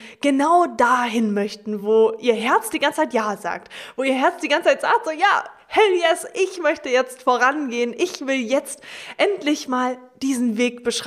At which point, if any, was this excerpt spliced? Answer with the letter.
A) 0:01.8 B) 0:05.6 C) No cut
C